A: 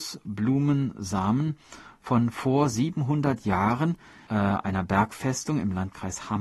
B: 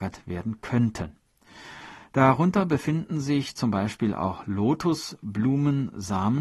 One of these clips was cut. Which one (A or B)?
A